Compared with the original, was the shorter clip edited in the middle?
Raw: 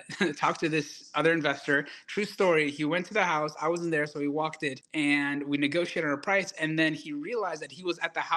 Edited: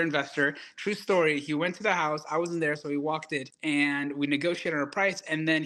no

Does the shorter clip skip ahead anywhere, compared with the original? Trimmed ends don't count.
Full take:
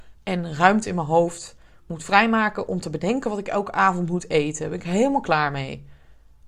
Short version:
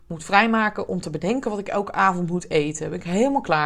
no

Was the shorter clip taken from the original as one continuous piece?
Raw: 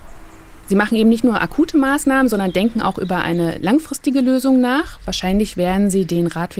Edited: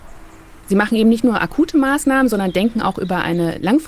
yes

